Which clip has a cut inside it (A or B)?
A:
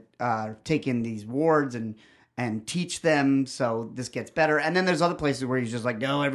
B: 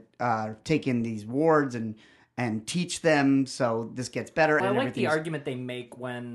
B